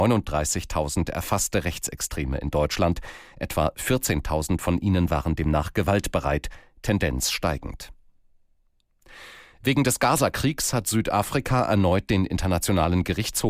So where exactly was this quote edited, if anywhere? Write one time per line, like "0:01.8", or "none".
none